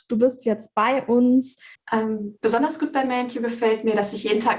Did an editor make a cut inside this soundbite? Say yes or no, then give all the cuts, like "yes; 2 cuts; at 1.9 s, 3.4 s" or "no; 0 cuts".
yes; 1 cut; at 1.8 s